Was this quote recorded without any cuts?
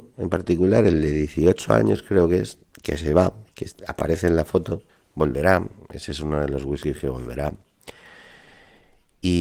yes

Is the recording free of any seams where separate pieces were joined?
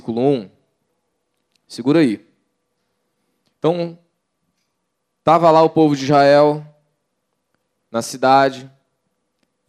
no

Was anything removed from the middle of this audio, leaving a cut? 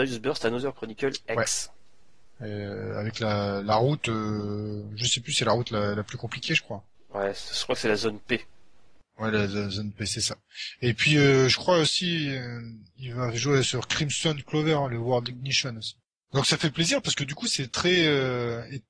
no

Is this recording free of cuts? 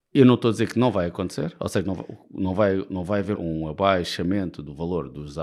no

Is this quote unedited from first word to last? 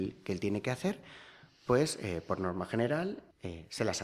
yes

